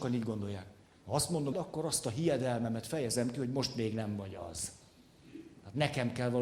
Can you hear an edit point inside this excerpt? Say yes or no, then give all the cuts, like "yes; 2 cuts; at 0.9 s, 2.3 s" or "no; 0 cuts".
yes; 1 cut; at 1.5 s